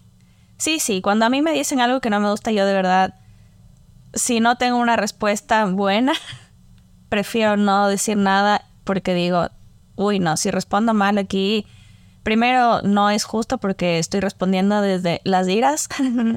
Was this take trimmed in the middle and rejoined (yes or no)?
no